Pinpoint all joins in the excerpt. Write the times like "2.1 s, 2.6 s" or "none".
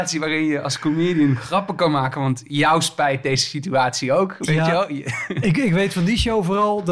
none